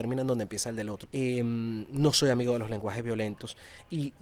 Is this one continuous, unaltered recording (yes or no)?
no